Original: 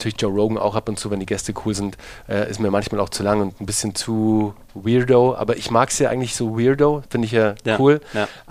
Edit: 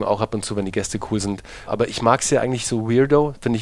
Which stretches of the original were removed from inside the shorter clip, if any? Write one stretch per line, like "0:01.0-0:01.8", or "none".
0:02.2-0:05.4